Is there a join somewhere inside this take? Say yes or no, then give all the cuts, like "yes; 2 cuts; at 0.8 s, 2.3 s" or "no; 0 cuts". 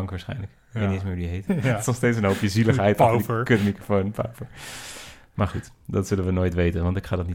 yes; 1 cut; at 1.5 s